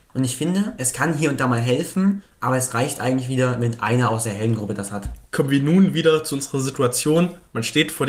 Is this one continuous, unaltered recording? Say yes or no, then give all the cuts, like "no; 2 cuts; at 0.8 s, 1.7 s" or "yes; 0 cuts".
no; 1 cut; at 5.3 s